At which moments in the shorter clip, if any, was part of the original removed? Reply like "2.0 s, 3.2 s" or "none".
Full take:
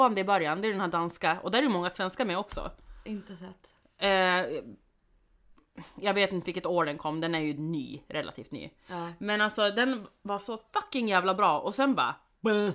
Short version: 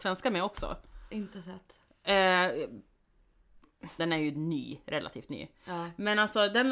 4.0 s